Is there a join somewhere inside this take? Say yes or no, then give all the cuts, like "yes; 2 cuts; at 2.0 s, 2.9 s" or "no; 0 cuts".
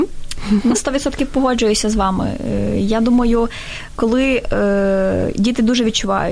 no; 0 cuts